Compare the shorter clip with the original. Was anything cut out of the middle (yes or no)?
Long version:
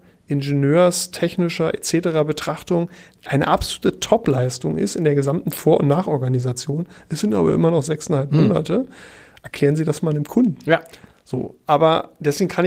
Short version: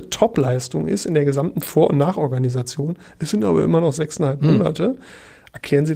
no